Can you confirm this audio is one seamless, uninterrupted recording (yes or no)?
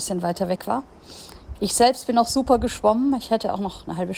yes